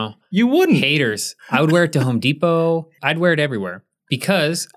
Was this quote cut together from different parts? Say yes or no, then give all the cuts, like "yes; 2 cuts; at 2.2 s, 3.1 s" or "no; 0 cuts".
yes; 2 cuts; at 1.4 s, 3.0 s